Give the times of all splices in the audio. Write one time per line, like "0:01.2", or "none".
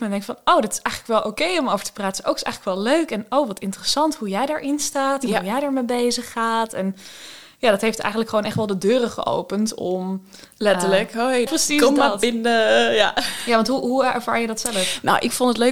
0:11.5